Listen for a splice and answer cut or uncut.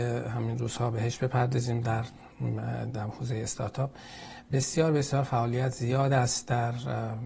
uncut